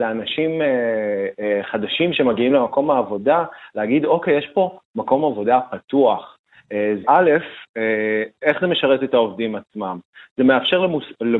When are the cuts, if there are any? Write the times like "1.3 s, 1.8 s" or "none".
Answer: 7.0 s